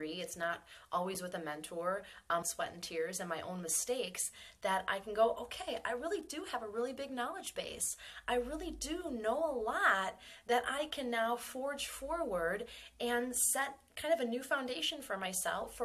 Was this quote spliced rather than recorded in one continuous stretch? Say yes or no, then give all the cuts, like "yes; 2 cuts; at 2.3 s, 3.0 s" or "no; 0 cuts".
yes; 1 cut; at 2.4 s